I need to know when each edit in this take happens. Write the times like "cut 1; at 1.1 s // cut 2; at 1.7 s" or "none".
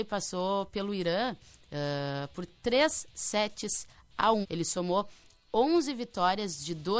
cut 1; at 4.4 s